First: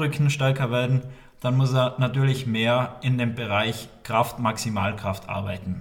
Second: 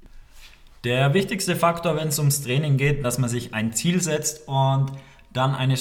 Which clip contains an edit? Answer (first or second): second